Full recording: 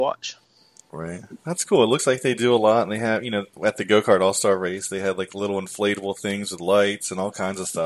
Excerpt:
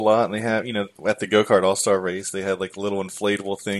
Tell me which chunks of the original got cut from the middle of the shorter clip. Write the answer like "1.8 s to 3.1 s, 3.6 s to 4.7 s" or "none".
none